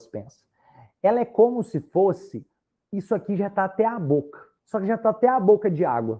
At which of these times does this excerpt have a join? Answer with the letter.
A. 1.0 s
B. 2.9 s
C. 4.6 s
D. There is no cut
C